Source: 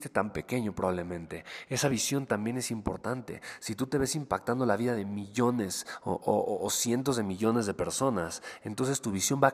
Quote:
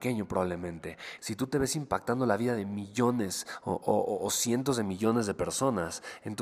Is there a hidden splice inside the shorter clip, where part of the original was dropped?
yes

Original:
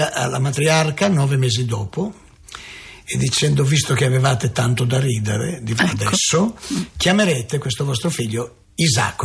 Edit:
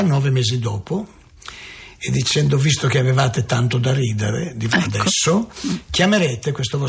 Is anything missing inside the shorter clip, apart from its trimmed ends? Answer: no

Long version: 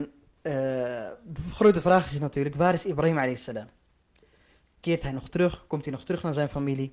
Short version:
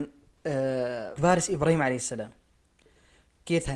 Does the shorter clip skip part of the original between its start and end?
yes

